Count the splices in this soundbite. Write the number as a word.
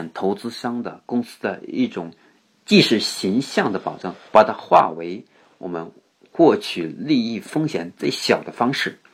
one